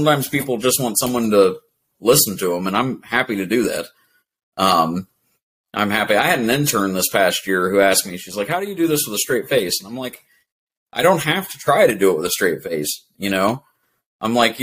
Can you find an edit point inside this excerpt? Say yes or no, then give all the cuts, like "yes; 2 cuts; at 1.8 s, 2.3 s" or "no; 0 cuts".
yes; 1 cut; at 1.9 s